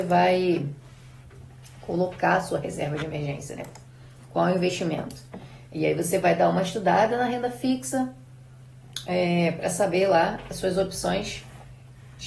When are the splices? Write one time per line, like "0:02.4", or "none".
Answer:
none